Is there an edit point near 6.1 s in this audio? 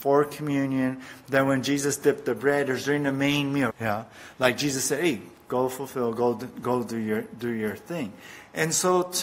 no; 1 cut; at 3.7 s

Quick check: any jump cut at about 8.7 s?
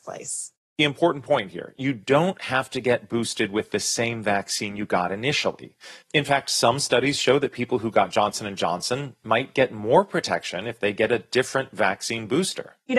no; 1 cut; at 6.0 s

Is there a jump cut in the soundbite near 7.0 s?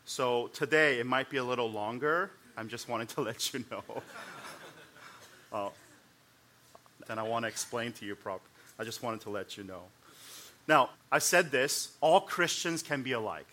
yes; 2 cuts; at 7.0 s, 10.9 s

